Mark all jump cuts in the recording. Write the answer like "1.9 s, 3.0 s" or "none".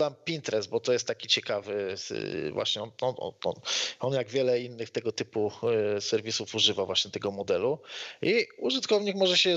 none